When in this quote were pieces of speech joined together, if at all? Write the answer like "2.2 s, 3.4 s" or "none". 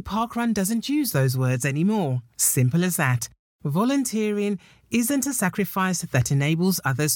none